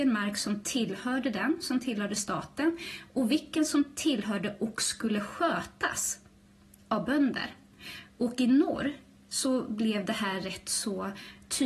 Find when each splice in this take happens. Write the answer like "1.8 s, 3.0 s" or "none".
none